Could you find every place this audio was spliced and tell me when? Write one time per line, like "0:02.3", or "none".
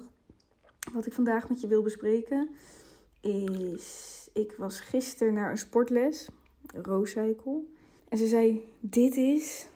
0:08.0